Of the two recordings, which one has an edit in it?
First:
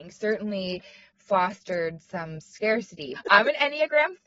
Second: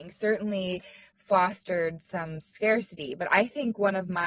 first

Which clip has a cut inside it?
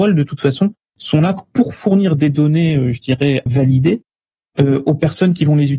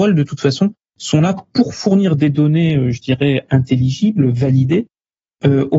first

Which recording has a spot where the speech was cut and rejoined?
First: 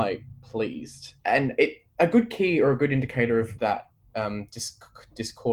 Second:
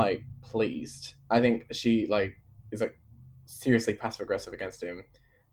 first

